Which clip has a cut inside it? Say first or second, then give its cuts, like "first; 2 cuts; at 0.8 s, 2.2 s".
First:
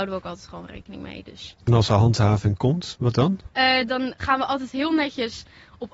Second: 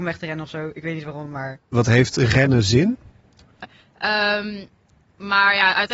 second; 1 cut; at 3.6 s